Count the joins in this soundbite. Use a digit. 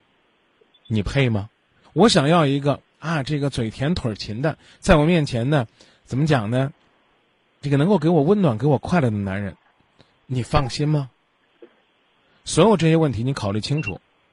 1